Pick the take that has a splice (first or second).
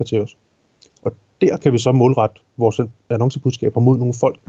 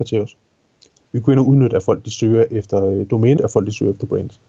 second